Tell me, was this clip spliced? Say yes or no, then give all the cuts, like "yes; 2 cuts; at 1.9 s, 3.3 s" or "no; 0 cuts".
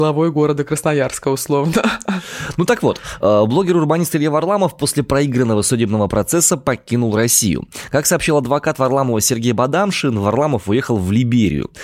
no; 0 cuts